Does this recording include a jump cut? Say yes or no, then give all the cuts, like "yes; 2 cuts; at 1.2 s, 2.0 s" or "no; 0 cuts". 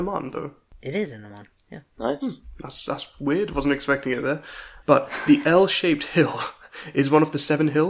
yes; 1 cut; at 4.8 s